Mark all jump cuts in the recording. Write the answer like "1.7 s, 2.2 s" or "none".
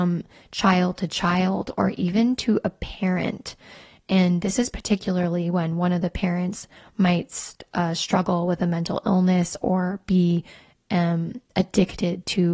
none